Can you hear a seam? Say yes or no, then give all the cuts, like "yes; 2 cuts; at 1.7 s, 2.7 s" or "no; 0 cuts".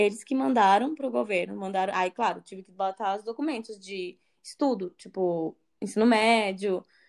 no; 0 cuts